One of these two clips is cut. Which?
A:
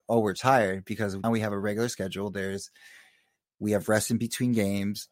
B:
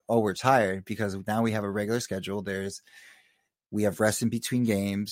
A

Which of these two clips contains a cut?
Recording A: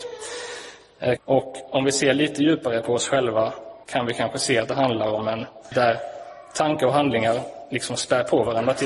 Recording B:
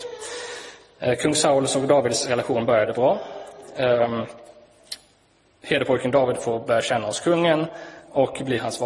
A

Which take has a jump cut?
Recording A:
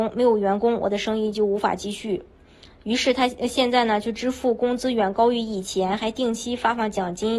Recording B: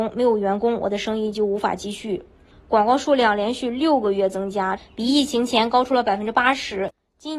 B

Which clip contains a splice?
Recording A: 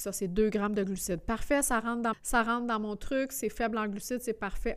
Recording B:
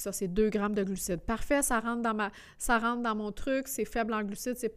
A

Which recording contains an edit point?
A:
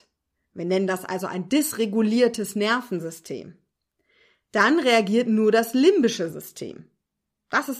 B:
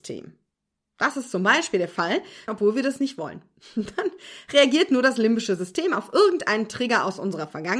B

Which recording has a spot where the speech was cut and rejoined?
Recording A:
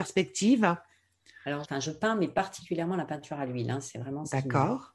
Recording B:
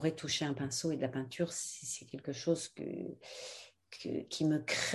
A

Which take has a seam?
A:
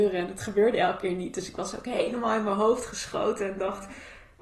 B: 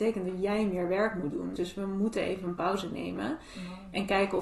B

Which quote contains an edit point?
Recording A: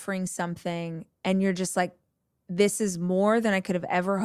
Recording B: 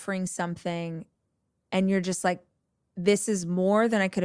A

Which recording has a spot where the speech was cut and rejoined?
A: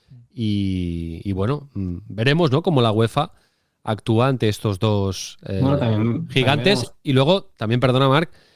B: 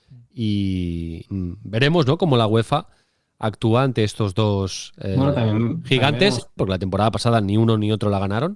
B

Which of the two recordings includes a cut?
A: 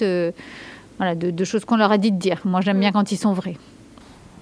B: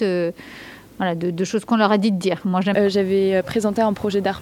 B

